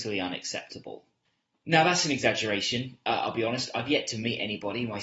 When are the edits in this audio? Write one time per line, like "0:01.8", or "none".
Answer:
none